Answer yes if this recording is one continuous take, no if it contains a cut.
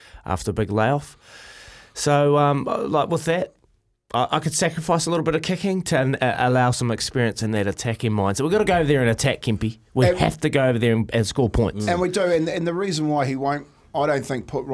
yes